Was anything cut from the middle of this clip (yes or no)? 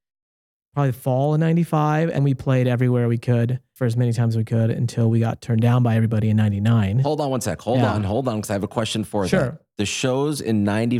yes